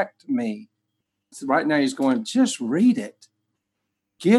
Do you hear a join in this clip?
yes; 1 cut; at 1.3 s

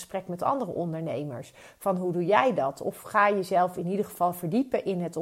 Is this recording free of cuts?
yes; 0 cuts

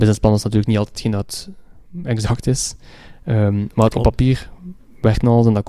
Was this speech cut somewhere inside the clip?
no; 0 cuts

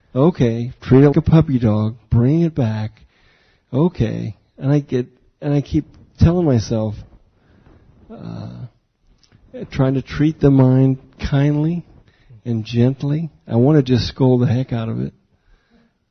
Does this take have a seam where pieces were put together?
yes; 1 cut; at 1.1 s

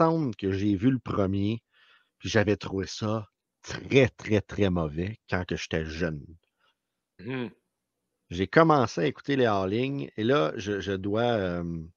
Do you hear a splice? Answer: yes; 1 cut; at 7.2 s

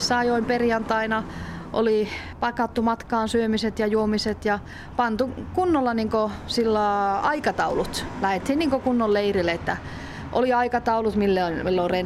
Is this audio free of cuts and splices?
yes; 0 cuts

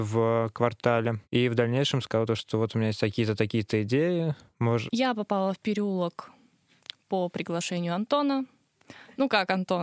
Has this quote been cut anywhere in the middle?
yes; 2 cuts; at 1.2 s, 4.9 s

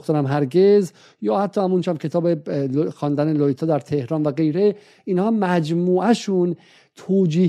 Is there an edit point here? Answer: no; 0 cuts

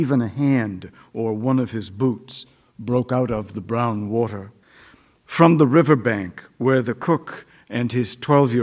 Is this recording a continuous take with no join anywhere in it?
yes; 0 cuts

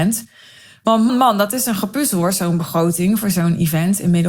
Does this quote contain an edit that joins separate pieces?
yes; 1 cut; at 1.1 s

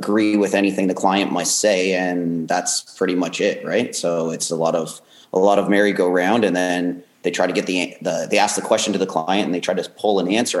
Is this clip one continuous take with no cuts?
yes; 0 cuts

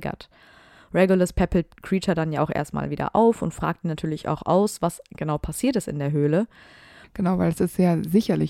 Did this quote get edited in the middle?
yes; 1 cut; at 7.0 s

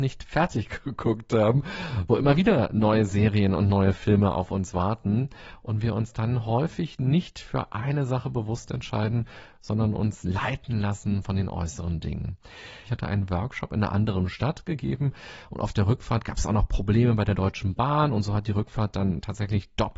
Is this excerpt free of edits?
no; 1 cut; at 12.9 s

